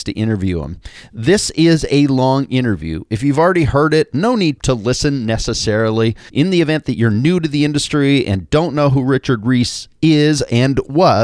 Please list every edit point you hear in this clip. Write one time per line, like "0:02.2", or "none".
0:04.6
0:06.3